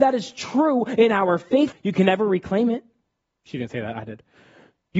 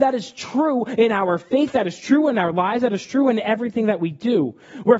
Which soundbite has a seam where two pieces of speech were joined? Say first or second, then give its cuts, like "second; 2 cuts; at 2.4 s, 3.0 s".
first; 1 cut; at 1.7 s